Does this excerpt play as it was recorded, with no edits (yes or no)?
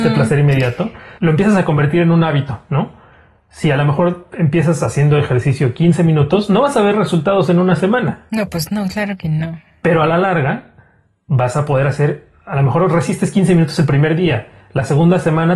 no